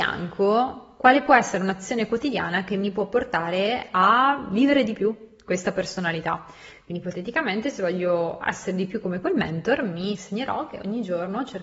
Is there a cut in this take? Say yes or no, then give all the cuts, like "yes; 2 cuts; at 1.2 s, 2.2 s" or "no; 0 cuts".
no; 0 cuts